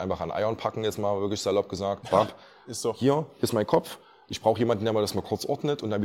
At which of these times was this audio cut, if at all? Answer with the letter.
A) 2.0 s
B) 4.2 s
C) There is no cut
A